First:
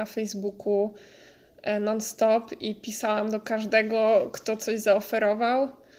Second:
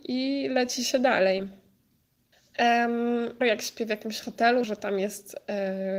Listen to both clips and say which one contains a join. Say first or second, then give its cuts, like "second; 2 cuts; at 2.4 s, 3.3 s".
second; 2 cuts; at 3.4 s, 4.6 s